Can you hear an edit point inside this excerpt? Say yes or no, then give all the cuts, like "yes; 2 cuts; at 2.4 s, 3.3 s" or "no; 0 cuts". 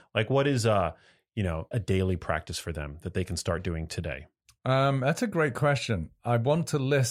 yes; 1 cut; at 1.7 s